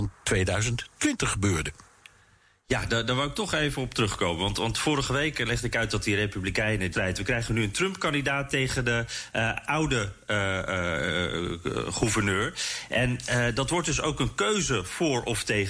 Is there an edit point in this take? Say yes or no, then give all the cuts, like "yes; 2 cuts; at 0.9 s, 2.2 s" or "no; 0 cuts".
yes; 1 cut; at 6.9 s